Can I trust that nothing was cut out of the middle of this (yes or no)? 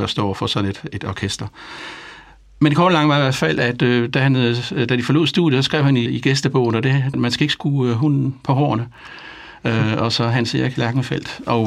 no